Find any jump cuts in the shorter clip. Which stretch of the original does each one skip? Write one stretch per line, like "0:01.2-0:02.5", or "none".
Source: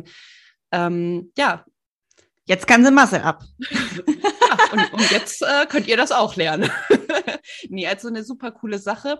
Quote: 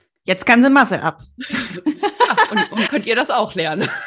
0:05.1-0:05.7